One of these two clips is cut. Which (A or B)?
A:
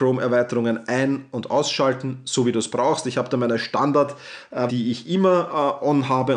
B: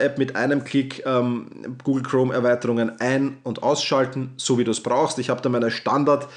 A